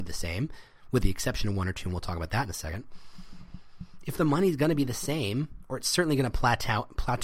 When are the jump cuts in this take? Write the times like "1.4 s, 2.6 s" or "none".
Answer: none